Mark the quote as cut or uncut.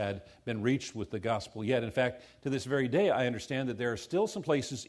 uncut